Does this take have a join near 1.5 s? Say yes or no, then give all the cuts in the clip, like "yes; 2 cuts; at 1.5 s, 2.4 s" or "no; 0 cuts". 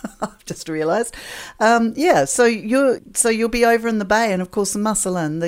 no; 1 cut; at 3.0 s